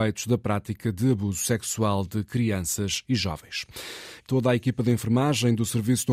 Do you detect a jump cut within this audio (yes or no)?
yes